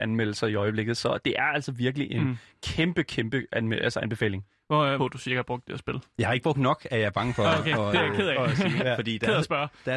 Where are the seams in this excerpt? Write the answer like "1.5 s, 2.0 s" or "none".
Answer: 5.0 s